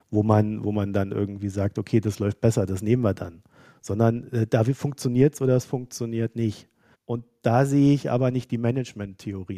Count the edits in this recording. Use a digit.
1